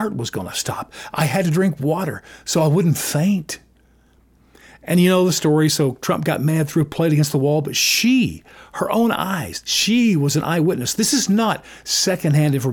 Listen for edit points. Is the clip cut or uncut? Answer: uncut